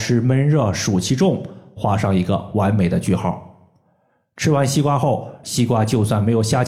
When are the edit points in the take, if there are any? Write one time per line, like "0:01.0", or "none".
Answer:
0:05.4